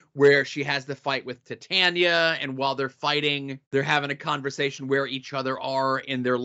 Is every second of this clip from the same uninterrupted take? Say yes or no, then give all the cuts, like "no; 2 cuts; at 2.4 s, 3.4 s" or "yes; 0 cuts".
no; 1 cut; at 3.6 s